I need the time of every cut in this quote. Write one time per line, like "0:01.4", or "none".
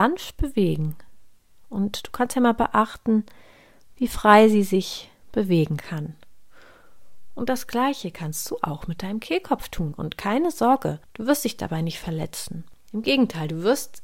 0:09.9